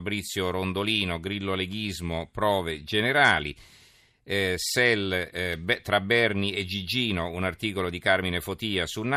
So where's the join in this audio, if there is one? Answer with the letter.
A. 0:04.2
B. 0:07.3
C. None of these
C